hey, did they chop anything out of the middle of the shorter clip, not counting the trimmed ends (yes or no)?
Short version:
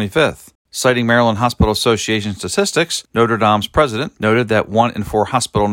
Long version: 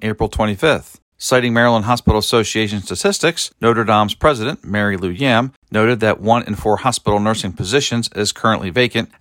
yes